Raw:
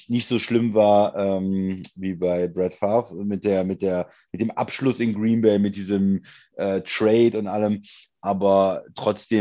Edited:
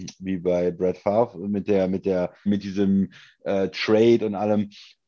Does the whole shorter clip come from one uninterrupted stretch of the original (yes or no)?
no